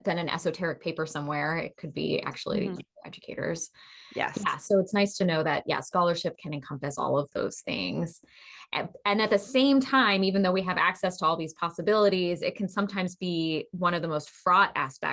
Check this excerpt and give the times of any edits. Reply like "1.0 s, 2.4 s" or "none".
2.8 s